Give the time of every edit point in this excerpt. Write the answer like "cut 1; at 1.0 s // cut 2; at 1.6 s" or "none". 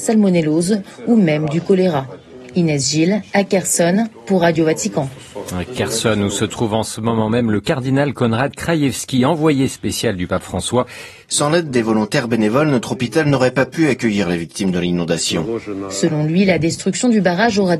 cut 1; at 11.2 s